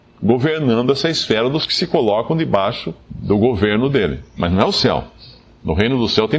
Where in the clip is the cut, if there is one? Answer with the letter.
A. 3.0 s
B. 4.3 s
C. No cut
A